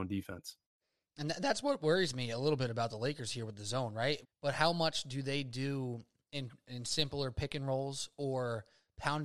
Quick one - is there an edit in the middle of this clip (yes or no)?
yes